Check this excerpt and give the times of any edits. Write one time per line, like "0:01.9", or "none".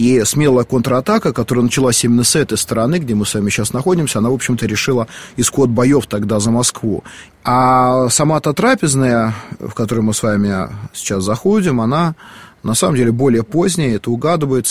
0:07.3